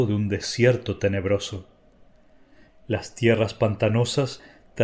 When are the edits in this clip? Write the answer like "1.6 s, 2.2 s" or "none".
none

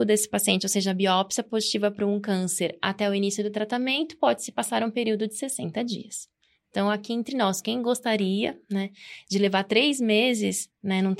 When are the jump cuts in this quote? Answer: none

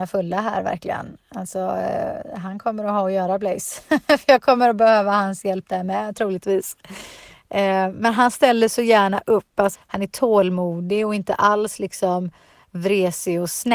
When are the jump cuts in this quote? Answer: 9.7 s

